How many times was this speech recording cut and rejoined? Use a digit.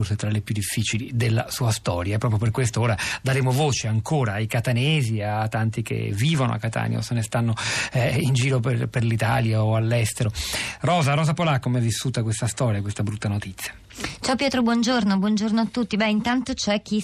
1